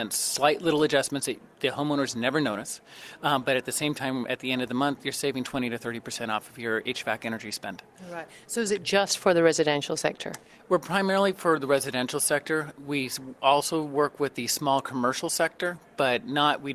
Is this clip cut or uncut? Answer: uncut